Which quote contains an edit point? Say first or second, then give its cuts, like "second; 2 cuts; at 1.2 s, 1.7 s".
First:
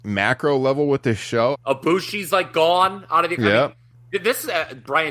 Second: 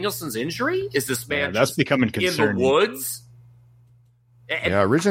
first; 1 cut; at 1.5 s